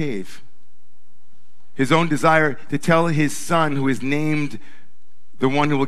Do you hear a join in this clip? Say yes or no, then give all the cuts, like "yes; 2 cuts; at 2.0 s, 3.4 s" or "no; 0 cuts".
no; 0 cuts